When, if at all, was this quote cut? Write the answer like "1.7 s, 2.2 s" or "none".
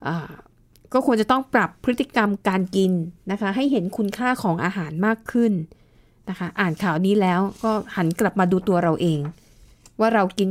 none